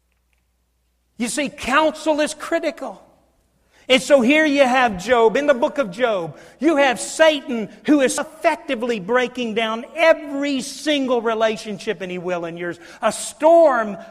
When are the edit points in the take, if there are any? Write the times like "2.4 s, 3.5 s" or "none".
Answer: 8.2 s